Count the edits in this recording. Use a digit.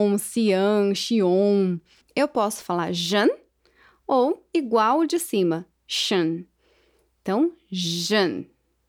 1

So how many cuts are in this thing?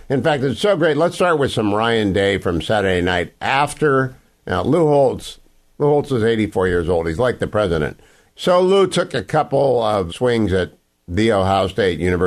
3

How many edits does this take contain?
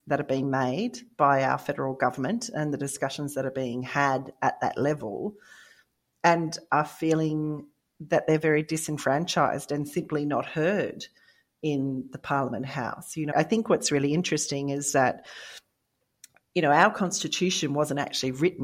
1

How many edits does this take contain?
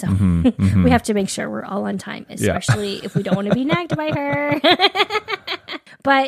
0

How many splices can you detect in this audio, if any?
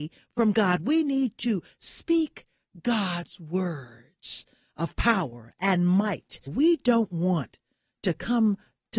1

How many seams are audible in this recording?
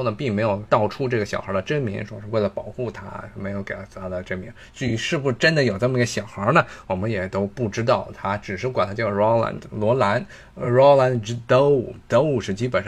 0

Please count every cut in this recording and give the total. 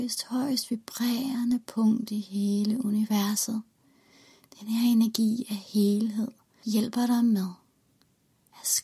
1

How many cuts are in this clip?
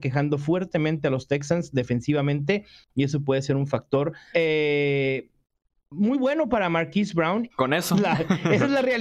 2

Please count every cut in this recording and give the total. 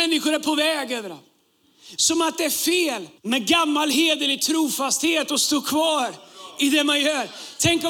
2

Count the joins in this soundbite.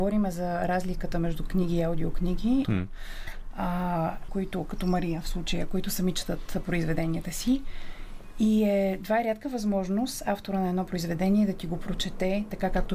2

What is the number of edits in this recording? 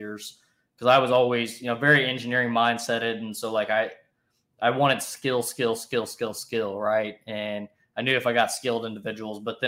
0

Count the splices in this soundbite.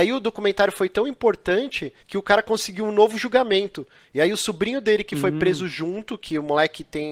1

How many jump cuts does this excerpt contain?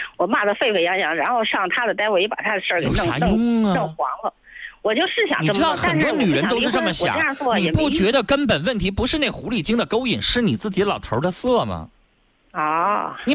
0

